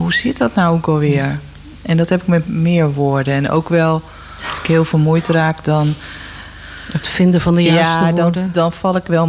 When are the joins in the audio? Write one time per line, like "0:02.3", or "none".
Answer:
0:02.4